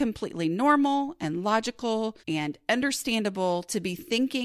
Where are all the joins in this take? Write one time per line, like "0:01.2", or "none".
0:02.2